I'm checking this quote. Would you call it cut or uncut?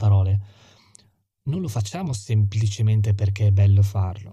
uncut